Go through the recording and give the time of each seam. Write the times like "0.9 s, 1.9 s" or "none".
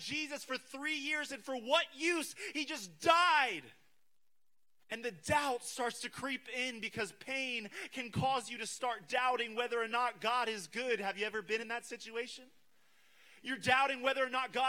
none